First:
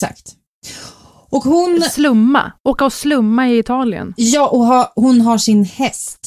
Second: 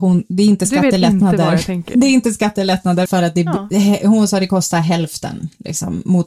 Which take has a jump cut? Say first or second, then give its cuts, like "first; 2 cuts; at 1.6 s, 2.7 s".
second; 1 cut; at 3.1 s